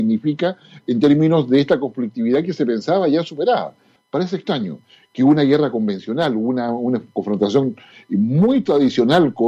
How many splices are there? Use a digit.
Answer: 1